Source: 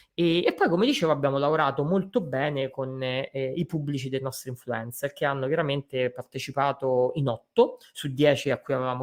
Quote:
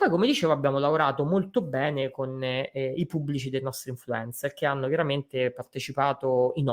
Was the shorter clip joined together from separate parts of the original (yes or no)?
no